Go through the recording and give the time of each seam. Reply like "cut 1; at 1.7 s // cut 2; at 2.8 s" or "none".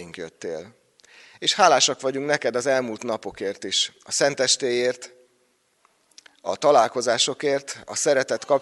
none